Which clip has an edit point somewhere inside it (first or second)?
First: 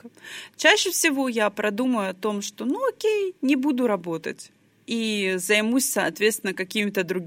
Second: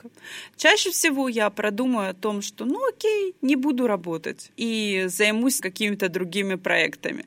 second